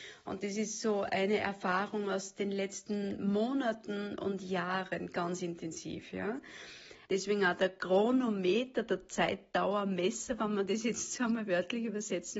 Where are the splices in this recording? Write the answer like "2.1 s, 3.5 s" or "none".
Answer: 7.1 s